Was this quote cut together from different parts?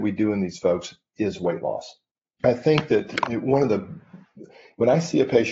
yes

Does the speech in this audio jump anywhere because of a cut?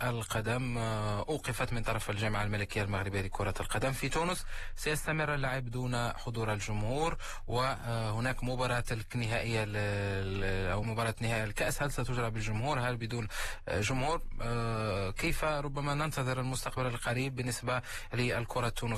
yes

